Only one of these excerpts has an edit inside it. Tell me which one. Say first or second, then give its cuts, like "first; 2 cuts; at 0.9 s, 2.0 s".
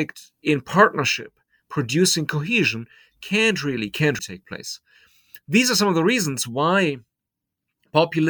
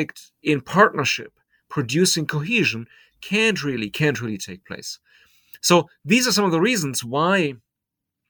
first; 2 cuts; at 4.2 s, 5.4 s